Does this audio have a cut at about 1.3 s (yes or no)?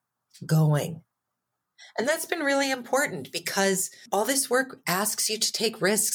no